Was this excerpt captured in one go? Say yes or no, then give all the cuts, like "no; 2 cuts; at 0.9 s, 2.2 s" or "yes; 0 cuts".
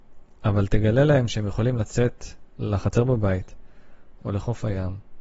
no; 2 cuts; at 2.6 s, 4.2 s